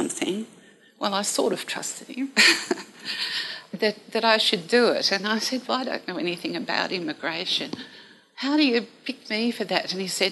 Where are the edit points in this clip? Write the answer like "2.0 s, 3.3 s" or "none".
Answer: 3.7 s, 5.7 s